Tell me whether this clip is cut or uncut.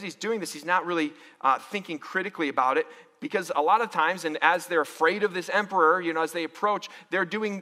uncut